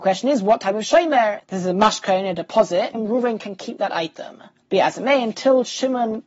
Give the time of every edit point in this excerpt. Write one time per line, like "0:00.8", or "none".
0:01.4
0:02.9